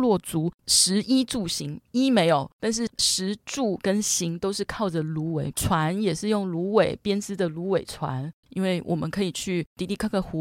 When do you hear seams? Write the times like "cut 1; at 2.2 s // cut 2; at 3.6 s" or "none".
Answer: cut 1; at 5.5 s // cut 2; at 8.4 s